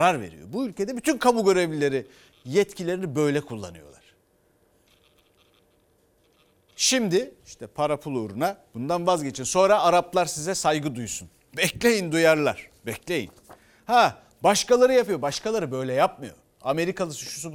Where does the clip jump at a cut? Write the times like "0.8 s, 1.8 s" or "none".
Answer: 7.4 s

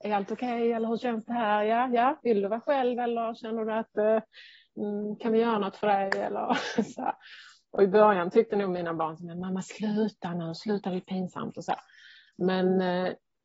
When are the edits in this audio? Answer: none

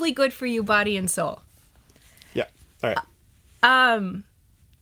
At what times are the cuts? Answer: none

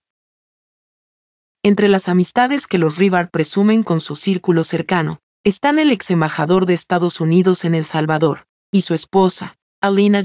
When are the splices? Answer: 5.3 s, 8.6 s

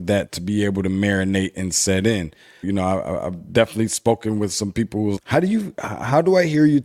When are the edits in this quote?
2.6 s, 5.2 s

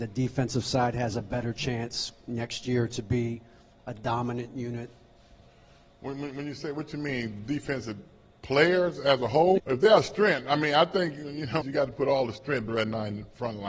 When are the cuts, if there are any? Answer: 9.6 s, 11.6 s, 12.7 s

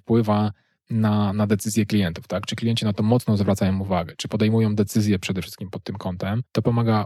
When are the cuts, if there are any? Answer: none

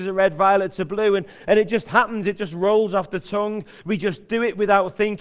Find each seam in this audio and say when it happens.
none

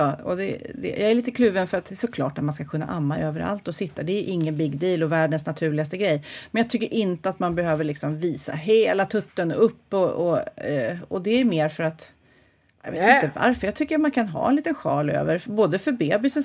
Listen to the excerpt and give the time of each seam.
none

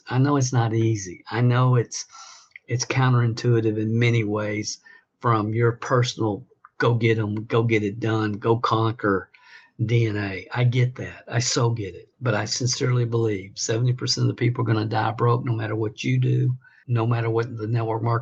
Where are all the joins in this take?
12.1 s, 16.8 s

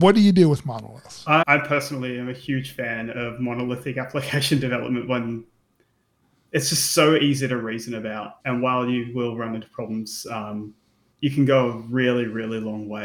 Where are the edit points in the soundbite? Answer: 8.4 s, 11.1 s

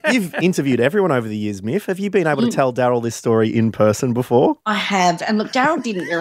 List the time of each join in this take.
4.6 s

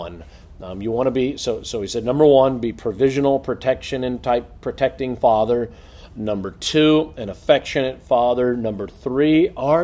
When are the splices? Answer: none

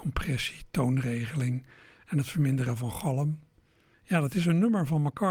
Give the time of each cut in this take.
3.9 s

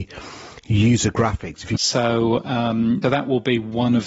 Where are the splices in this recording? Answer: 1.8 s, 3.0 s

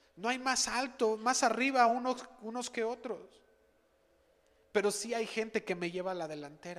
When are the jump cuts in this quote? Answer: none

